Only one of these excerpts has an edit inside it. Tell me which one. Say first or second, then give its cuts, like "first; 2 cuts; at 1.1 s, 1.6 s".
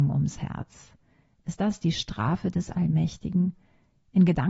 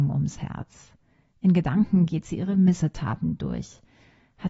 second; 1 cut; at 1.3 s